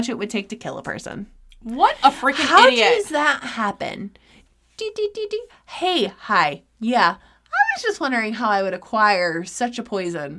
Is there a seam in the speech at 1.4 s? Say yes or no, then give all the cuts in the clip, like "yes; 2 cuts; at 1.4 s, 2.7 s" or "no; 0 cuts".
no; 0 cuts